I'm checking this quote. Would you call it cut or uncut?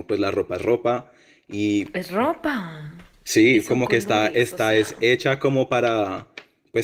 uncut